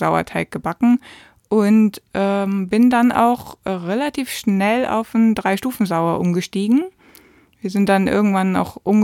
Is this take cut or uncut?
uncut